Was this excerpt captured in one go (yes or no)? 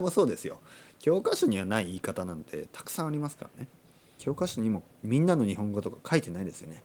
no